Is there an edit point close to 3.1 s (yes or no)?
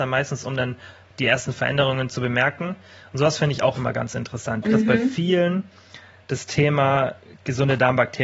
no